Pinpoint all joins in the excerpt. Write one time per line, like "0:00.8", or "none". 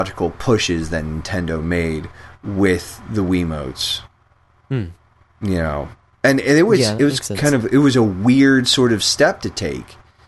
none